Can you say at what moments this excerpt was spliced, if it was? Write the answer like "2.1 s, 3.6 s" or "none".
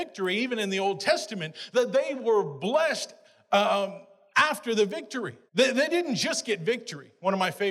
5.5 s